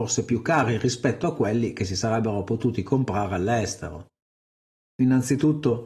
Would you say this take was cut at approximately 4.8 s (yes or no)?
yes